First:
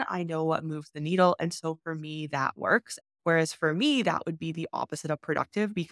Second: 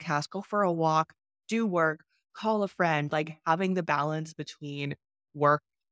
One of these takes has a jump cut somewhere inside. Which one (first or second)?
first